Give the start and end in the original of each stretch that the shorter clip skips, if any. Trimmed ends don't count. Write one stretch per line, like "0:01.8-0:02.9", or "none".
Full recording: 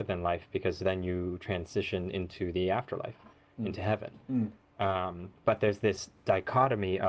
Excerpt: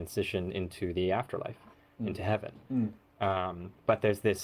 none